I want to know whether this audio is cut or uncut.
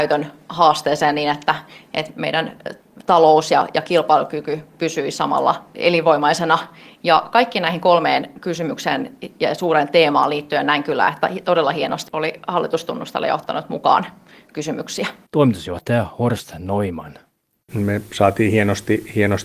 cut